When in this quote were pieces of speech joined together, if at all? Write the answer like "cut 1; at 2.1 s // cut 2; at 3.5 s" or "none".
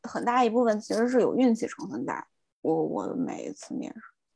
none